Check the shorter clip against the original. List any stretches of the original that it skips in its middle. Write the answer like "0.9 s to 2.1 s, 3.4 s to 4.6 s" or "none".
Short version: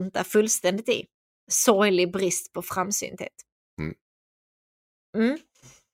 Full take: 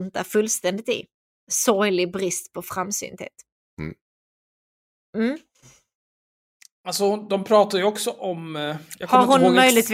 none